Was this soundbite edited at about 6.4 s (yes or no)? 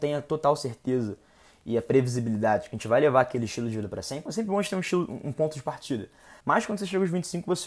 yes